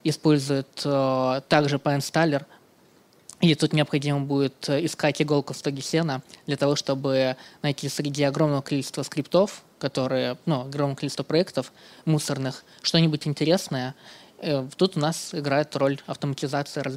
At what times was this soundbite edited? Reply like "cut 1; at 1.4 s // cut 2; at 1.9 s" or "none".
none